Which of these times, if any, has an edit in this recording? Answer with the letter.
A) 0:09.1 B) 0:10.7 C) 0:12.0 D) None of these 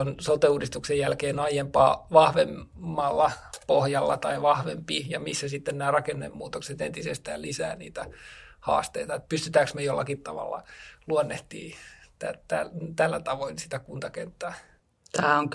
D